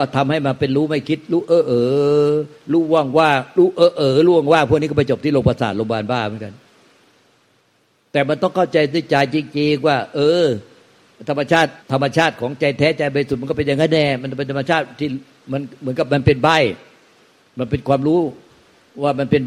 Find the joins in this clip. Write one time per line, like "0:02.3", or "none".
0:11.8